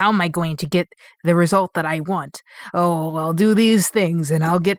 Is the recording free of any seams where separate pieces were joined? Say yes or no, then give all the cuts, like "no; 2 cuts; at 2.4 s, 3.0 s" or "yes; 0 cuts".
yes; 0 cuts